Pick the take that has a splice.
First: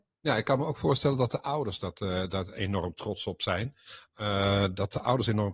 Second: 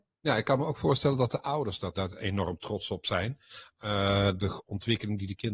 second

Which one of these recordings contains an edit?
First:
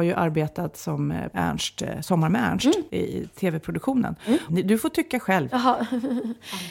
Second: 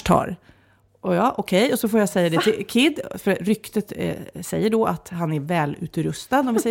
first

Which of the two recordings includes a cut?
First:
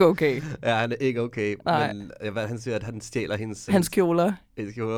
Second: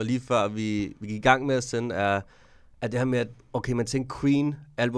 first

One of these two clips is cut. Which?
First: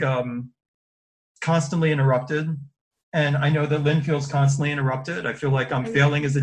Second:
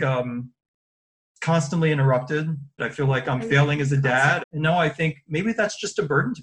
second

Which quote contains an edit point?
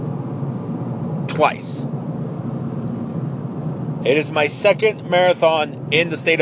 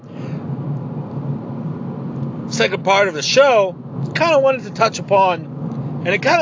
first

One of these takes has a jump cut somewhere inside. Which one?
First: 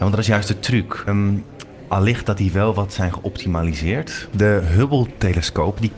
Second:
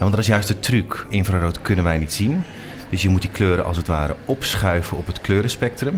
first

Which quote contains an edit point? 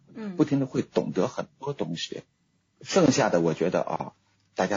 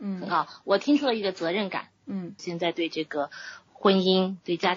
second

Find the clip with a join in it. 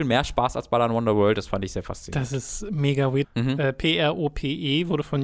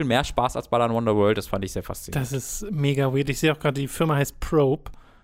first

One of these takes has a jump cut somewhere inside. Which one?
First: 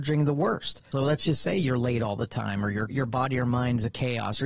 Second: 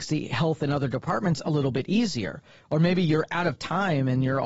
first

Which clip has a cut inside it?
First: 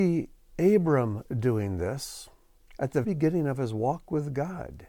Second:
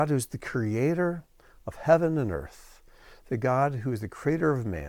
first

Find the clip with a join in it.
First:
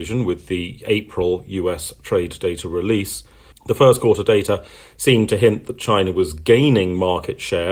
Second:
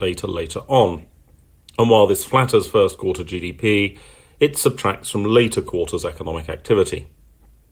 first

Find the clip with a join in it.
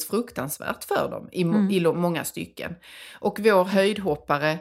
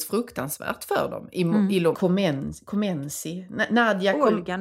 second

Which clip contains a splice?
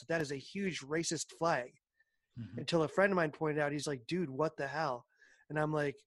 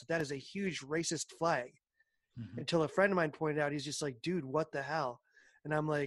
first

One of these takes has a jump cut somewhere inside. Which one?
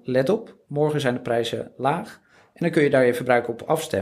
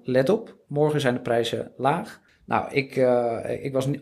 second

